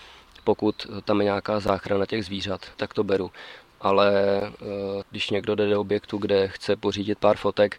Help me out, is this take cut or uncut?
cut